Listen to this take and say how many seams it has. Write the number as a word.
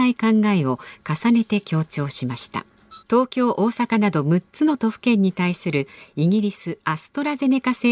one